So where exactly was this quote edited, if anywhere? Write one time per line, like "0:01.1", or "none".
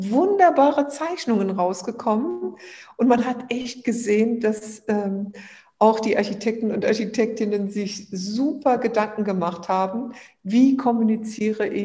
none